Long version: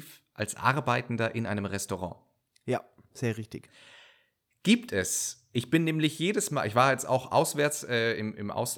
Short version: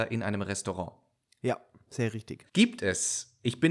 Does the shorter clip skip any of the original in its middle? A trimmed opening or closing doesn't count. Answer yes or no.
yes